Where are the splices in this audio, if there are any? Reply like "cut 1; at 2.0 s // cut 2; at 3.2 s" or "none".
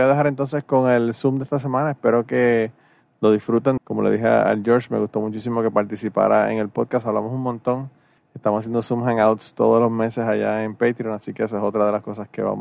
cut 1; at 3.8 s